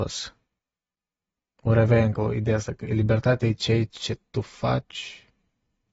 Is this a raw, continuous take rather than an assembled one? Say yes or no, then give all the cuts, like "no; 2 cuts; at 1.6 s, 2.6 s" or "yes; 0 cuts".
yes; 0 cuts